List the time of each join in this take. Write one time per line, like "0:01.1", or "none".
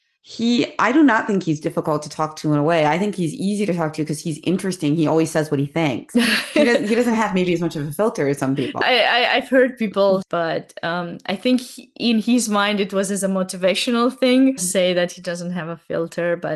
0:08.8
0:10.2
0:14.6